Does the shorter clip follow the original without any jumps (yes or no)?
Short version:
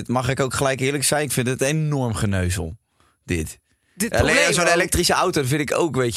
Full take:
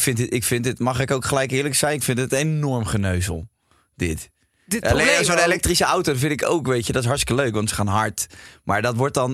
yes